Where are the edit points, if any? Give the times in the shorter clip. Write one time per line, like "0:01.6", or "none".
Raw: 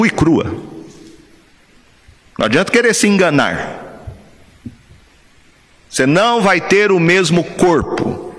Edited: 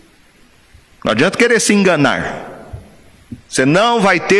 0:03.4